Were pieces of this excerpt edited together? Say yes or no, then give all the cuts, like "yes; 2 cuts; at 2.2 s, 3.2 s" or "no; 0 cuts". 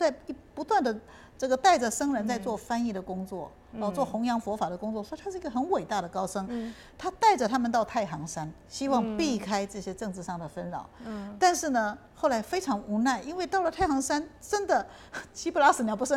no; 0 cuts